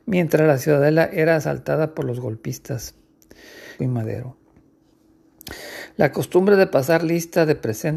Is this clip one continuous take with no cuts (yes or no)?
no